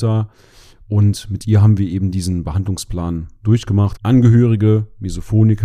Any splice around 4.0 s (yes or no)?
yes